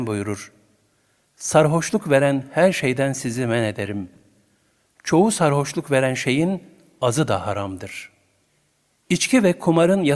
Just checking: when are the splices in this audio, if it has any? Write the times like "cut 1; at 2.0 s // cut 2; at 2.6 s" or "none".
none